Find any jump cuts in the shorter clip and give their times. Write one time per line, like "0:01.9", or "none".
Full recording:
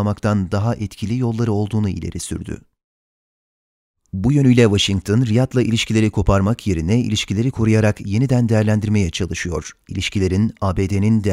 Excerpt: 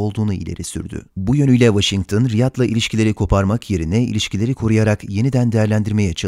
0:01.1

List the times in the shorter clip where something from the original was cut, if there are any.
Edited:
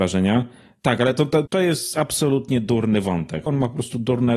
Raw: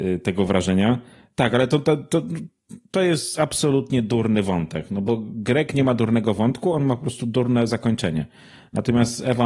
0:01.5
0:03.5

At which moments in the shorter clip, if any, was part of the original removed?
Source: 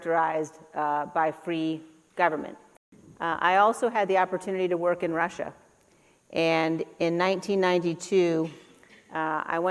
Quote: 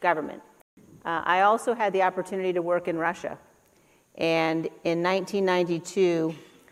none

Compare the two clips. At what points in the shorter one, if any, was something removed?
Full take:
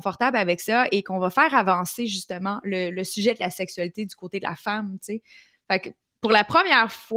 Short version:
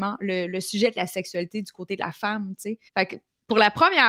0:02.9

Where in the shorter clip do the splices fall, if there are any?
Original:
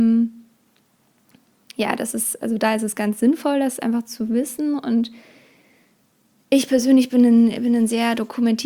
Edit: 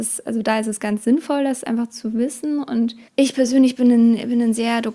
0:03.1

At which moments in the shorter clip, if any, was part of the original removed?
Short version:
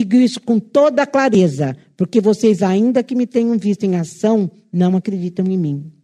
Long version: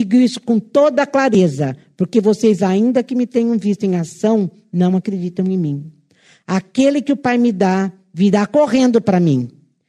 none

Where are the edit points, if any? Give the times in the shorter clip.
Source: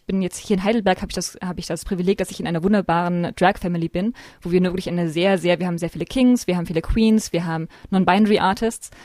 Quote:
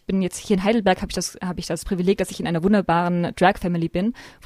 none

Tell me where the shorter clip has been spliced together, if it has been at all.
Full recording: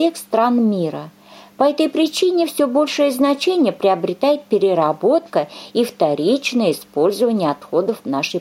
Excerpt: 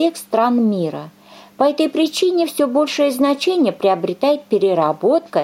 none

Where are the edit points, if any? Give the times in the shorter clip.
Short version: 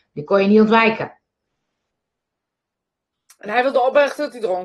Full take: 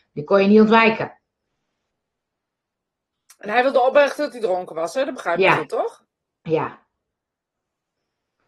none

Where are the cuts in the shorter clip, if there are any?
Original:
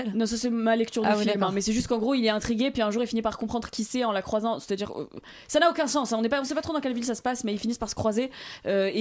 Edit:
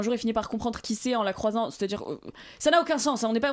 none

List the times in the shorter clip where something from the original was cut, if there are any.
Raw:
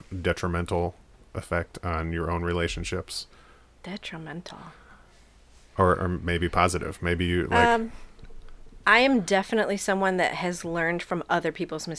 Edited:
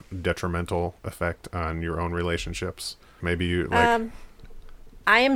0:01.0
0:03.2

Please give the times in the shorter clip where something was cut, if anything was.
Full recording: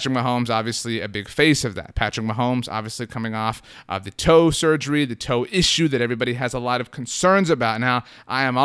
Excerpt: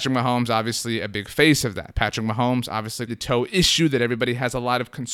0:03.1

